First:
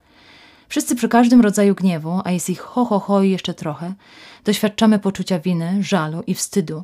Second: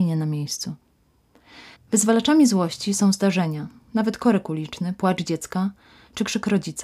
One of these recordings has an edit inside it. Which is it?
second; 1 cut; at 1.8 s

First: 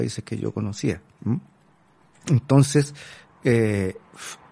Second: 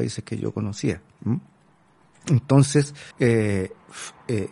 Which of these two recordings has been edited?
second; 1 cut; at 3.1 s

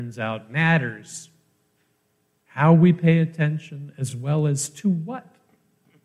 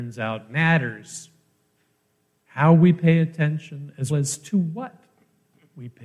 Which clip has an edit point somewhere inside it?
second; 1 cut; at 4.1 s

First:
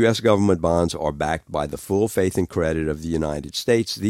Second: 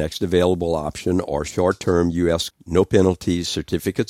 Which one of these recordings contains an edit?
second; 1 cut; at 2.5 s

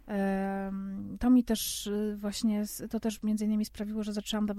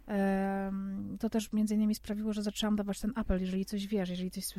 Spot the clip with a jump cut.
second; 1 cut; at 1.2 s

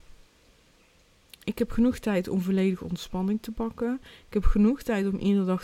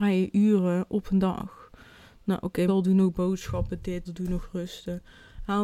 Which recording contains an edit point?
second; 2 cuts; at 2.7 s, 4.0 s

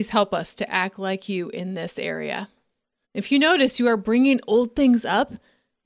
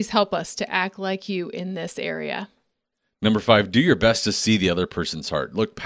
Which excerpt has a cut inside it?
first; 1 cut; at 3.0 s

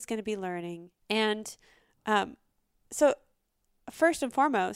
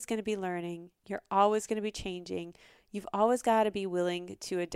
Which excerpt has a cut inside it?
first; 1 cut; at 1.0 s

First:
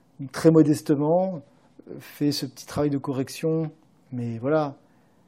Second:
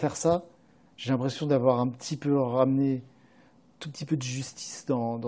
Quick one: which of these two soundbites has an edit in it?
first; 1 cut; at 4.0 s

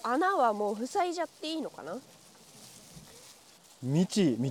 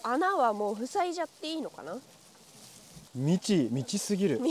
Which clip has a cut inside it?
second; 1 cut; at 3.1 s

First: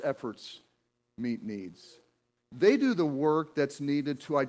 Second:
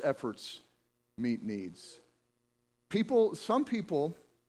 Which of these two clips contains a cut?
first; 1 cut; at 2.4 s

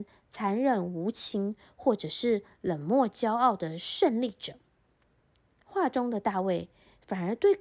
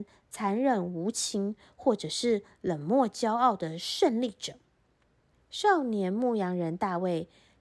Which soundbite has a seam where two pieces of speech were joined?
second; 1 cut; at 5.3 s

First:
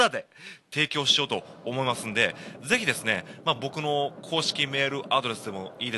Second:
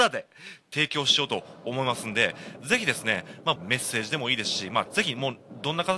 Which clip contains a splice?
second; 2 cuts; at 3.6 s, 4.9 s

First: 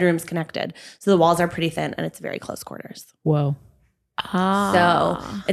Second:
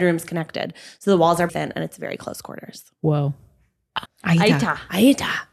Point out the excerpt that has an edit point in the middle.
second; 2 cuts; at 1.5 s, 4.0 s

